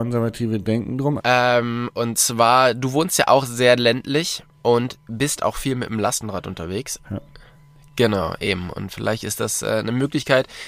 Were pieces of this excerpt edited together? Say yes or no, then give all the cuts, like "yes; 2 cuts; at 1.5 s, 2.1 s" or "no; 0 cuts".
yes; 2 cuts; at 1.2 s, 7.0 s